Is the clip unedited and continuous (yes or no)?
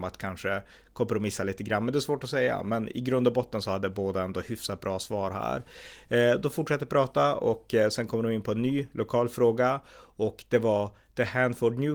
yes